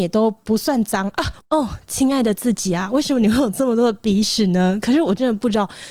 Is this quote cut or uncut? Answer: cut